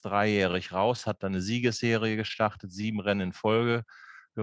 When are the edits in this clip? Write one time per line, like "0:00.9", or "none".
none